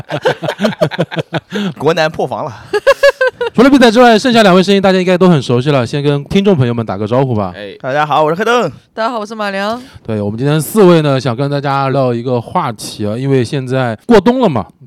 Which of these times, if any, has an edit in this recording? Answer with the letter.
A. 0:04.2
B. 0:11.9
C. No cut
B